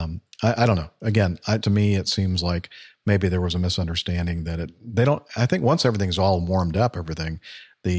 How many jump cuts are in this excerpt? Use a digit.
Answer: 1